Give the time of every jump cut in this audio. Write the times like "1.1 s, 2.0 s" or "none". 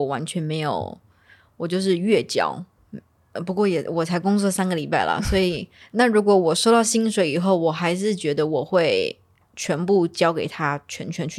5.8 s